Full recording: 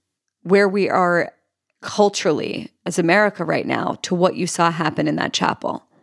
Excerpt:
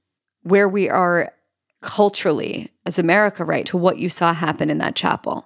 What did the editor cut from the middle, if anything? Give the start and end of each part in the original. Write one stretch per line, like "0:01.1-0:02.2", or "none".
0:03.6-0:04.0